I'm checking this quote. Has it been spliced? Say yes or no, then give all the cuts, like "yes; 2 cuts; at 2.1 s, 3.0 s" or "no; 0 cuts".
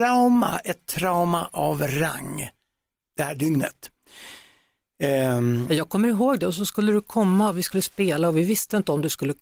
no; 0 cuts